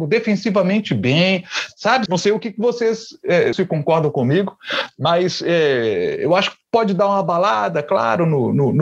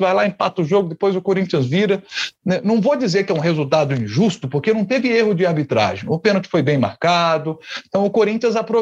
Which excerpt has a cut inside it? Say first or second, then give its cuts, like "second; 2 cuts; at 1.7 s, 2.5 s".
first; 2 cuts; at 2.1 s, 3.5 s